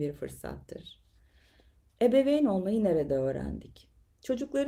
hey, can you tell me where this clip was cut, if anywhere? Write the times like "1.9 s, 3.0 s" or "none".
none